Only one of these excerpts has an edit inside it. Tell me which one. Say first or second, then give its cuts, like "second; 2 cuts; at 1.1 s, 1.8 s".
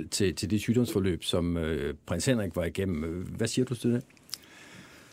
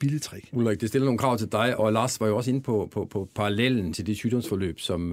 second; 2 cuts; at 1.8 s, 3.9 s